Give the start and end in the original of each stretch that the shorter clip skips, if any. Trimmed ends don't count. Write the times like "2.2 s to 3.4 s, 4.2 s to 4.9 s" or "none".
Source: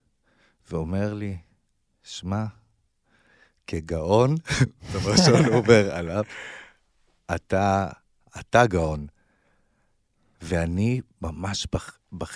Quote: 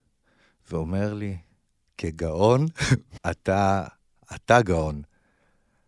1.9 s to 3.6 s, 4.9 s to 7.2 s